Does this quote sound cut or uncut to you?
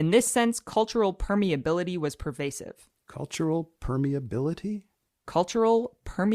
uncut